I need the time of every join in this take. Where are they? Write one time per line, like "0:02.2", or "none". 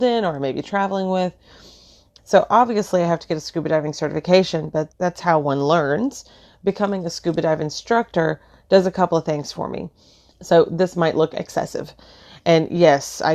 0:02.2
0:04.9
0:10.3